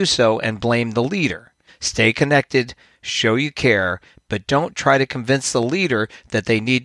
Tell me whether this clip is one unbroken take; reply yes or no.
no